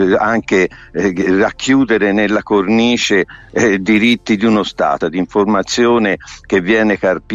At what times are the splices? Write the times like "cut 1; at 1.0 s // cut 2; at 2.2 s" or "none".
cut 1; at 5.0 s